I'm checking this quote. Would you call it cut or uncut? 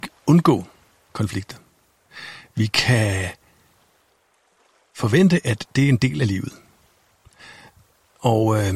uncut